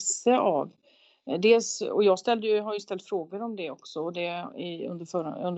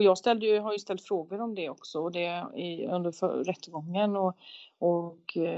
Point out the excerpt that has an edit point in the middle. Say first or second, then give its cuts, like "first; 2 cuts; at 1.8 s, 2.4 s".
second; 1 cut; at 2.9 s